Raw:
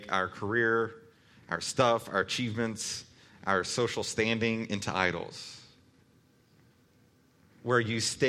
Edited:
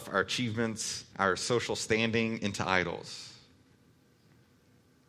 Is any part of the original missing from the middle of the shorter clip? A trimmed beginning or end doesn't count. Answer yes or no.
yes